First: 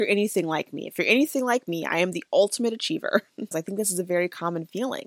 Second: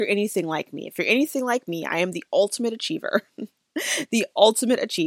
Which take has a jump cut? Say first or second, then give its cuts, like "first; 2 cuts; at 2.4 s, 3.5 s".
first; 1 cut; at 3.5 s